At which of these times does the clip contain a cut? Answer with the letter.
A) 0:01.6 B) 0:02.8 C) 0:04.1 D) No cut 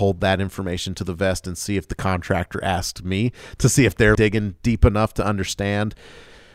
C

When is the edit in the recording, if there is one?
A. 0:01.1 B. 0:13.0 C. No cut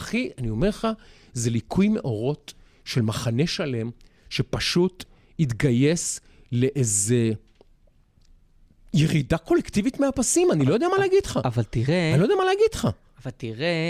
C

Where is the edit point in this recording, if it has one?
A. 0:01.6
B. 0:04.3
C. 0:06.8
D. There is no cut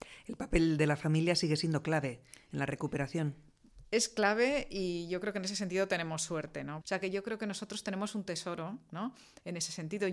C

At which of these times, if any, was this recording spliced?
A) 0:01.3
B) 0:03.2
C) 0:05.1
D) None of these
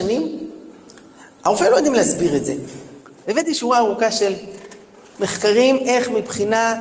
B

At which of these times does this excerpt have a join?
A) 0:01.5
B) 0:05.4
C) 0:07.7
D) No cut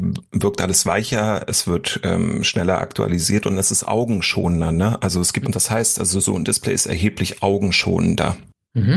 B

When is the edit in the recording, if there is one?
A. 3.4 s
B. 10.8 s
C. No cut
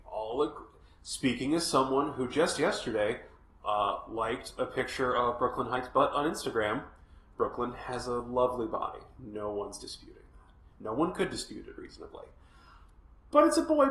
C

